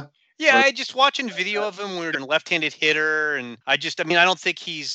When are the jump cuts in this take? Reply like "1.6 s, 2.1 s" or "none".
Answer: 2.1 s, 3.6 s